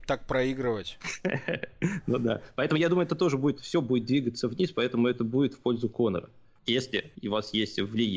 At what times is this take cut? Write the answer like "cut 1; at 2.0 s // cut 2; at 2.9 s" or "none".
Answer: cut 1; at 3.5 s